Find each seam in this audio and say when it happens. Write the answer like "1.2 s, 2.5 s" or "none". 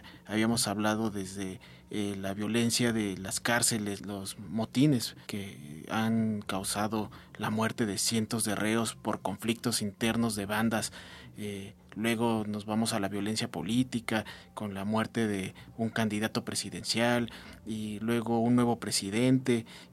none

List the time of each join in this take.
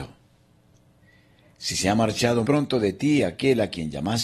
2.4 s

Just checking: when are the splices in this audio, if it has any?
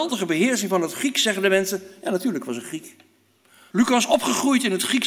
3.7 s

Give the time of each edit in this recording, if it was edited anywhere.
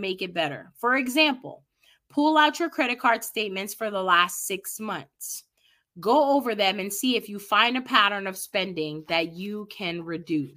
none

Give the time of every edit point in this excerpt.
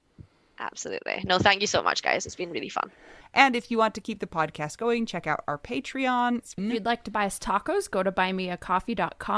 3.2 s, 6.6 s

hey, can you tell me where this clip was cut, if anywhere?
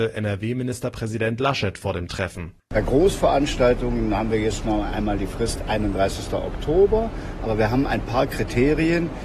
none

